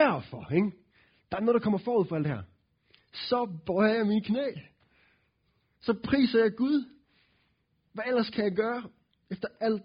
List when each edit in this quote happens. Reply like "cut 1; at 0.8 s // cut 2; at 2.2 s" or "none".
none

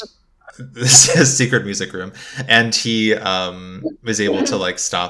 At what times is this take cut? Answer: none

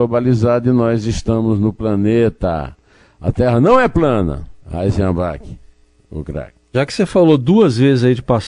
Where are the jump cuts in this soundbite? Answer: cut 1; at 4.6 s

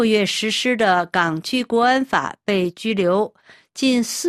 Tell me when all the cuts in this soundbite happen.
none

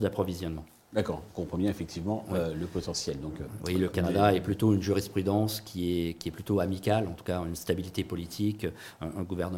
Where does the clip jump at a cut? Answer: none

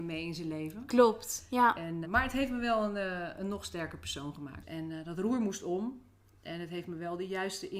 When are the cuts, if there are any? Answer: cut 1; at 2.0 s // cut 2; at 4.6 s

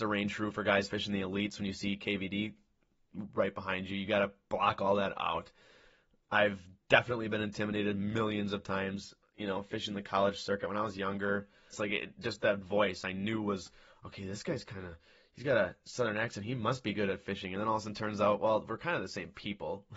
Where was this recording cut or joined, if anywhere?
cut 1; at 11.7 s

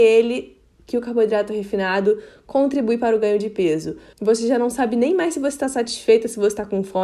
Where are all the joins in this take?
cut 1; at 4.1 s

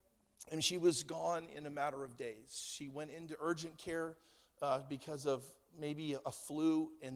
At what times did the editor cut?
none

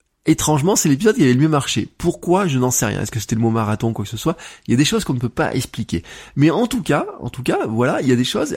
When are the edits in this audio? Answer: none

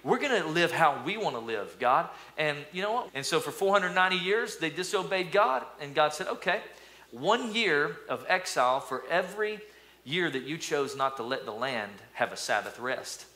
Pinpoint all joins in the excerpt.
cut 1; at 3.1 s // cut 2; at 7.1 s

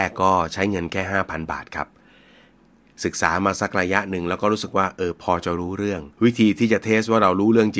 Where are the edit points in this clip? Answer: cut 1; at 6.1 s

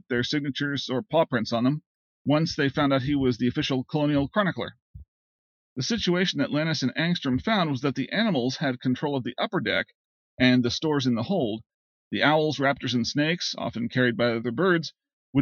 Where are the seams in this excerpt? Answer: none

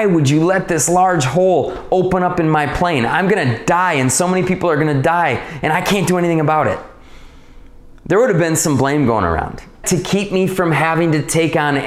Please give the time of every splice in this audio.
cut 1; at 9.8 s

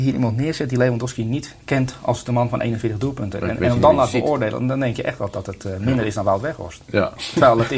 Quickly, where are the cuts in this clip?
none

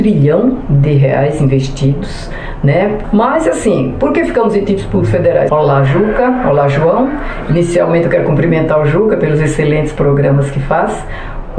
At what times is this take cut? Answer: cut 1; at 3.0 s // cut 2; at 5.5 s

